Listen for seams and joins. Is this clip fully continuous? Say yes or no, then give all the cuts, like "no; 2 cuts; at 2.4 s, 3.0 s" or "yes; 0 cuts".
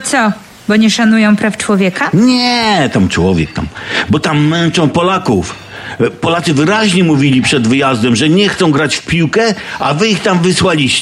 yes; 0 cuts